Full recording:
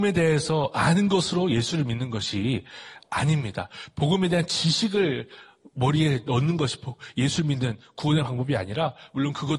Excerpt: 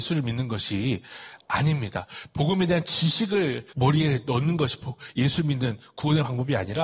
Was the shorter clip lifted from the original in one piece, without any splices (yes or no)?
no